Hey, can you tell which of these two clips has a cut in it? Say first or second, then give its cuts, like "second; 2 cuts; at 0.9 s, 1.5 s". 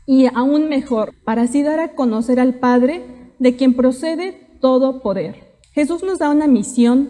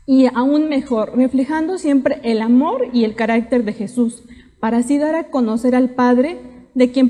first; 2 cuts; at 1.1 s, 5.6 s